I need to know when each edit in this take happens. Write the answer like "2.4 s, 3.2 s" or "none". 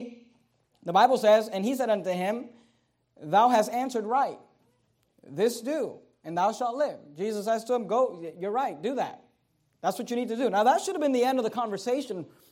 none